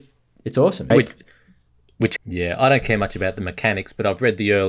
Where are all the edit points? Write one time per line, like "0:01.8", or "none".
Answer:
0:00.9
0:02.2